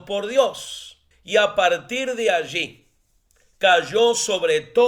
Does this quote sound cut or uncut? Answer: cut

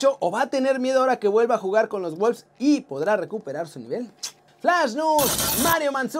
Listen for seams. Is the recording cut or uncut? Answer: cut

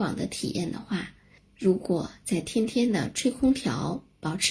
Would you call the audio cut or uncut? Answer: cut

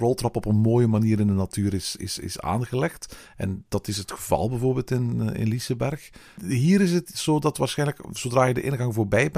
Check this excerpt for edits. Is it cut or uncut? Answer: uncut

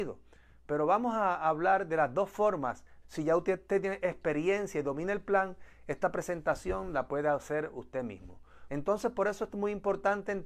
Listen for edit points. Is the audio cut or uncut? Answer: cut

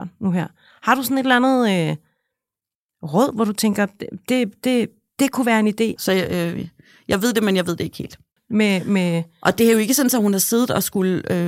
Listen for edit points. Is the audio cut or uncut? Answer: cut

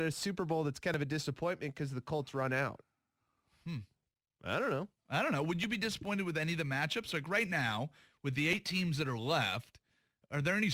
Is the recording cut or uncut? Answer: uncut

